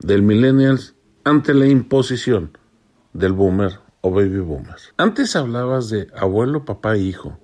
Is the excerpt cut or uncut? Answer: cut